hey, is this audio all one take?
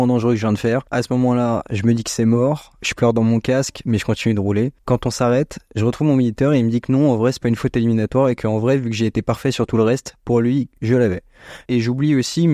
no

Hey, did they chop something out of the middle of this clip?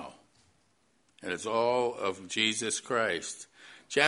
yes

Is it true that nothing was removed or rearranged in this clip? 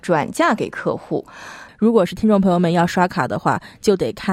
no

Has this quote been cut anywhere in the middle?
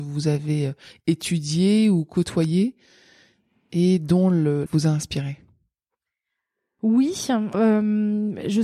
yes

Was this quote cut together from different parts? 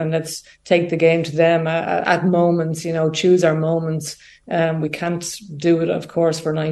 no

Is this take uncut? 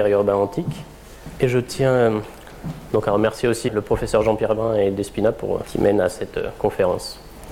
no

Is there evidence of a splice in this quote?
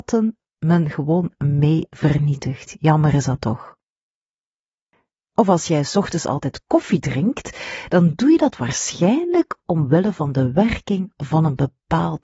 yes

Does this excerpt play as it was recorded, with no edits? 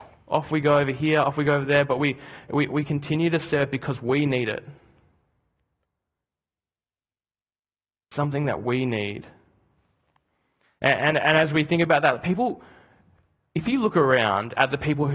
yes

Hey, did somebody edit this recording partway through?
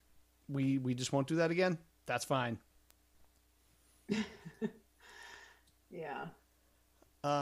no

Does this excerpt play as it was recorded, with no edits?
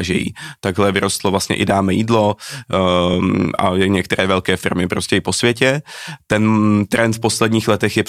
yes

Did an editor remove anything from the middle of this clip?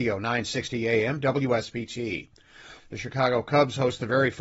yes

